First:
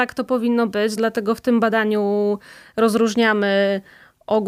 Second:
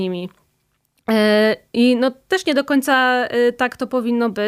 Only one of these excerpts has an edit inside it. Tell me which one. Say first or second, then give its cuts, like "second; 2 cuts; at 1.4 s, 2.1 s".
first; 1 cut; at 1.0 s